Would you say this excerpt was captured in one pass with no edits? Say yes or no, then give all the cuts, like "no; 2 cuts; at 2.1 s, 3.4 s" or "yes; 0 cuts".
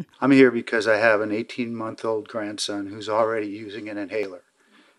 yes; 0 cuts